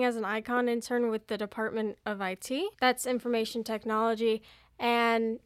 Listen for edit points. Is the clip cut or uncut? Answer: cut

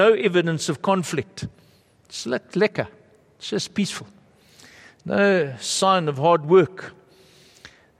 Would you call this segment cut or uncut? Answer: uncut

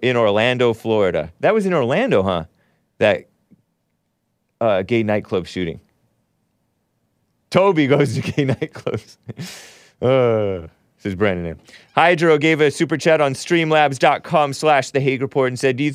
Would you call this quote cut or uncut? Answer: uncut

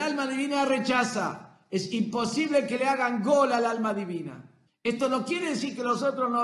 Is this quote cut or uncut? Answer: cut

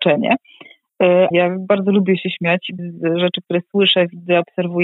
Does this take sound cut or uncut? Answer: cut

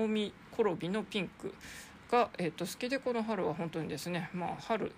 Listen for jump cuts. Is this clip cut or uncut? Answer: uncut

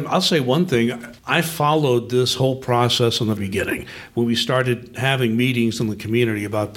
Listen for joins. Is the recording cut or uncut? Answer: cut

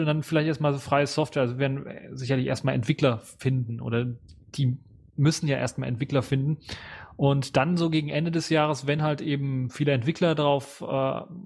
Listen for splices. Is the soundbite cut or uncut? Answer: uncut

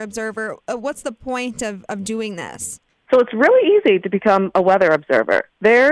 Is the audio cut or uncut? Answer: uncut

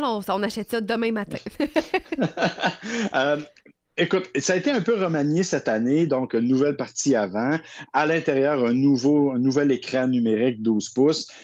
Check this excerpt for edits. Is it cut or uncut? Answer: uncut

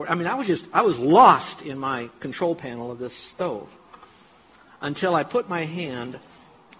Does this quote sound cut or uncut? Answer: uncut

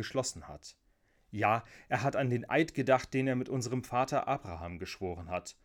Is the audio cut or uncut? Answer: uncut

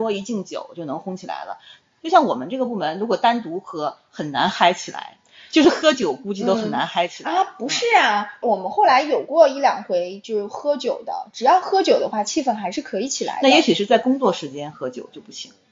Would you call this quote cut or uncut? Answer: uncut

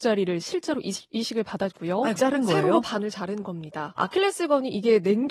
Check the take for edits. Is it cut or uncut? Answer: cut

